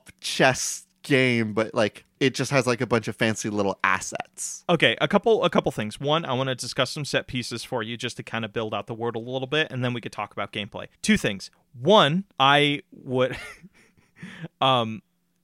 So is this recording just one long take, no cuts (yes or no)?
no